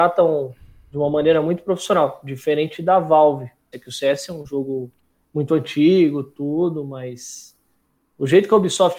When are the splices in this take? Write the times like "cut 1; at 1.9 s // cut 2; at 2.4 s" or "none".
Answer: cut 1; at 3.7 s